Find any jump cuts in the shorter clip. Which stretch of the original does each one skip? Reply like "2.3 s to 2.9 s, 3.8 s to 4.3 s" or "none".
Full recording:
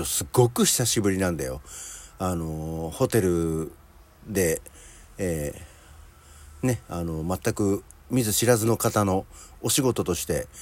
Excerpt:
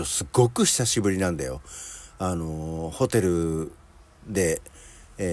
none